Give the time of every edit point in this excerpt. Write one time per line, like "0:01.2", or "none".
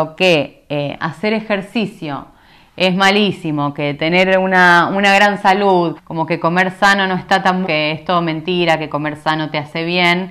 0:06.0
0:07.6